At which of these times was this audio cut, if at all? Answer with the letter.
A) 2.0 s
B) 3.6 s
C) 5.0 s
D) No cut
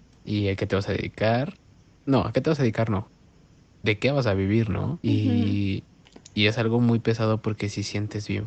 C